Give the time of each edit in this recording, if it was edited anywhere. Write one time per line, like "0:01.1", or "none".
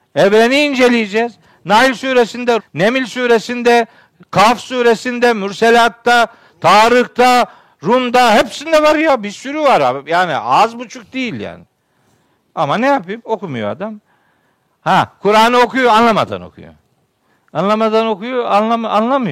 0:02.6